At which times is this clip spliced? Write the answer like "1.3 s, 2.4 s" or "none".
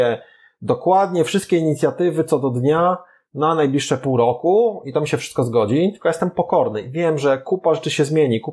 none